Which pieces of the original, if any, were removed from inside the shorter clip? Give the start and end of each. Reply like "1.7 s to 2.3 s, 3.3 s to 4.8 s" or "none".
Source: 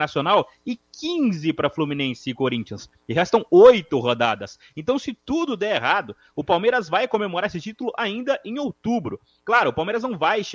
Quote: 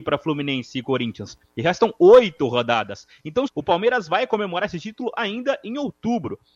5.0 s to 6.3 s